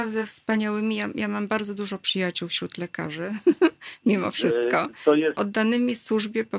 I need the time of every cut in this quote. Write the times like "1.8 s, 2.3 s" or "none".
5.3 s